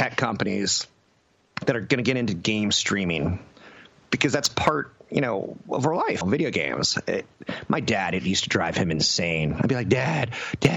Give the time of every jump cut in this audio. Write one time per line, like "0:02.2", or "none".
0:06.2